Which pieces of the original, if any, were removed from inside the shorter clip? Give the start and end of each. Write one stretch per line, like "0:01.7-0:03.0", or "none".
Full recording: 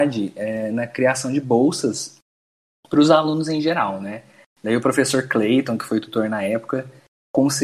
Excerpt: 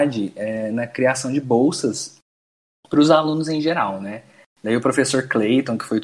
none